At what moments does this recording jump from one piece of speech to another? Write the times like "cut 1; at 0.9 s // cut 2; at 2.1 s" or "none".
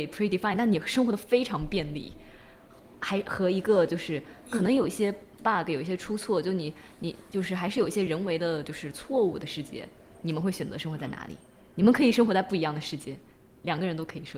none